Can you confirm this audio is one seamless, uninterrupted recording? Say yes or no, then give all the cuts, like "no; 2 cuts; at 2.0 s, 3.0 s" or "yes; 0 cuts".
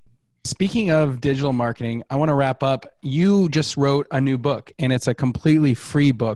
yes; 0 cuts